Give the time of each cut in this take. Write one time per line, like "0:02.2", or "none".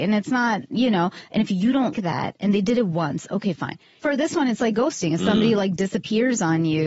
0:01.9
0:04.0